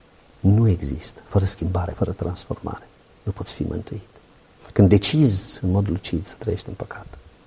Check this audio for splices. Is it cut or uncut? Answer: uncut